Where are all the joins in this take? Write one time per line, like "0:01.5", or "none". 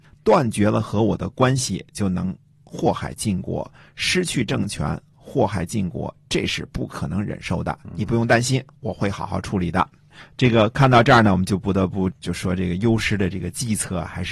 none